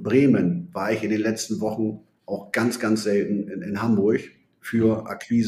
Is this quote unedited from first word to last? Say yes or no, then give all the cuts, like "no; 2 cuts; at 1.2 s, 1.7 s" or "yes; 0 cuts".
yes; 0 cuts